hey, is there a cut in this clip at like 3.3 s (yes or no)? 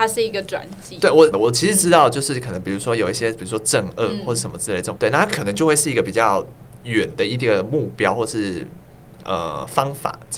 no